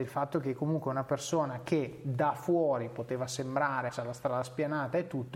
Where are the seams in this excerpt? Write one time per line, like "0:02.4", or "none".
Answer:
0:03.9